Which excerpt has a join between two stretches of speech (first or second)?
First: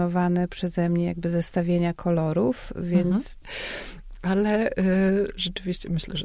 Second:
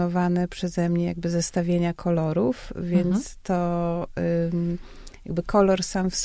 first